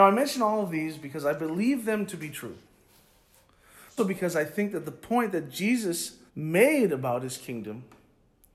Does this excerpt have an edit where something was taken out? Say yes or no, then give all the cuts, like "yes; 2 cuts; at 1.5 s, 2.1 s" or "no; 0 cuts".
yes; 2 cuts; at 4.0 s, 6.3 s